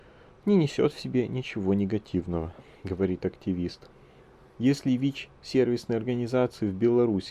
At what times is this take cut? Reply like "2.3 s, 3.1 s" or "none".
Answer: none